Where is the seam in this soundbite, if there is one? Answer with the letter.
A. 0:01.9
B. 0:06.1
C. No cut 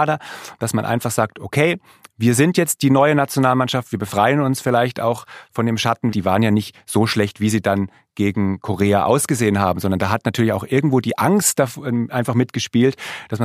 B